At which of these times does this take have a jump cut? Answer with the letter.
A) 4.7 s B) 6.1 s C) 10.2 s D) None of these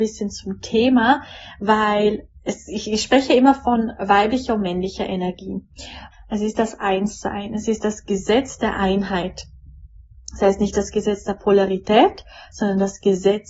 B